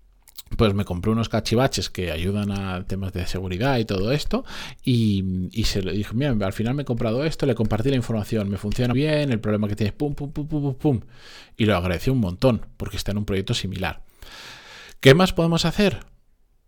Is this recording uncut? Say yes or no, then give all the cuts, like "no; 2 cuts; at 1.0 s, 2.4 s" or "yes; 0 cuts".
no; 1 cut; at 8.9 s